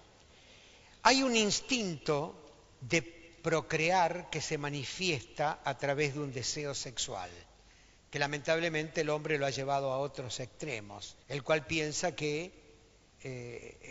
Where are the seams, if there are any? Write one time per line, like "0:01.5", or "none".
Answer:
0:11.2

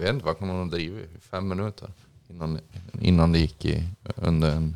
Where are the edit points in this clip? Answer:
none

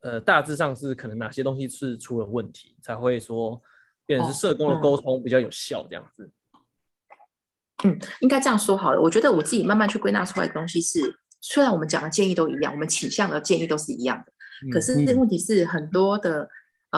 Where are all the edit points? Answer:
none

